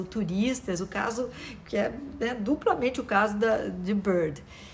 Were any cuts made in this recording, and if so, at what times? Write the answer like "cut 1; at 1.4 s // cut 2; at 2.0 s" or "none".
none